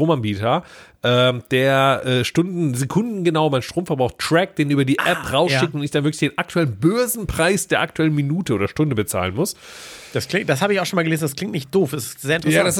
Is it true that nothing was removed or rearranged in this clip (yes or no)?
yes